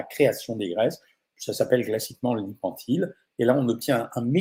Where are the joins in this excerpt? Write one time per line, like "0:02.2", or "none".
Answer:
none

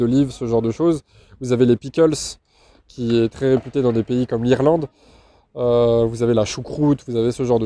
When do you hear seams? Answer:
none

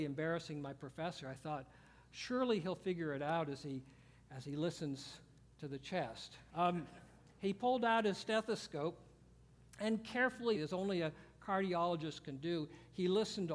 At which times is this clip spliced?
0:06.5
0:10.6

